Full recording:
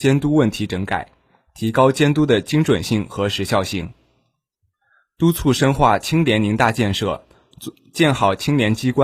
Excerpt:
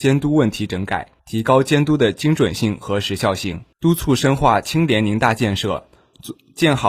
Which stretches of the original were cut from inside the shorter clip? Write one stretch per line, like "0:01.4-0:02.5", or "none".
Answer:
0:01.2-0:01.5
0:04.0-0:05.1